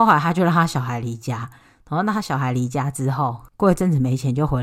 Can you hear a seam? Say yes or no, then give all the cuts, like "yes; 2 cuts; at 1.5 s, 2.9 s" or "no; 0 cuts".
no; 0 cuts